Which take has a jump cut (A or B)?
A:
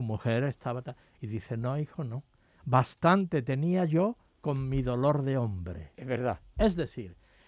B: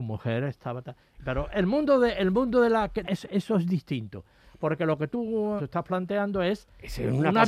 B